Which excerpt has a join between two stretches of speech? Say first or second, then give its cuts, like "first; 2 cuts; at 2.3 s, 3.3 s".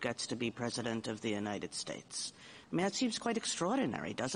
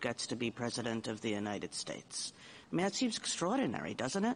second; 1 cut; at 3.2 s